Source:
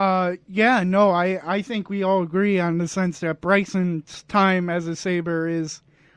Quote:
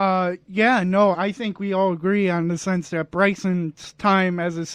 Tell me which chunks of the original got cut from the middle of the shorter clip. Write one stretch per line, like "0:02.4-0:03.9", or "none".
0:01.1-0:01.4